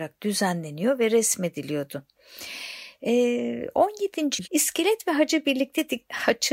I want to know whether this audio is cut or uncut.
cut